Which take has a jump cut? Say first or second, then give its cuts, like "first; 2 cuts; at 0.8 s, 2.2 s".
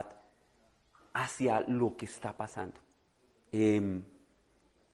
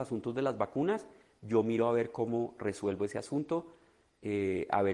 first; 1 cut; at 3.5 s